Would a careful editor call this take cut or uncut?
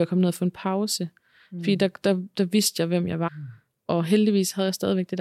cut